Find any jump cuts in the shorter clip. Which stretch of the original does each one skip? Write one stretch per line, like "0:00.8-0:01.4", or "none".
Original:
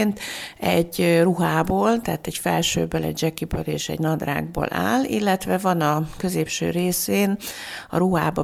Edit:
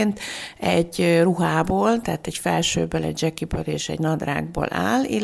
none